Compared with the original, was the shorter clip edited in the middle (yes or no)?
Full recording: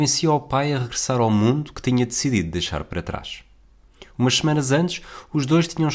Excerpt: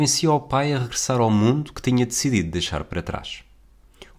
no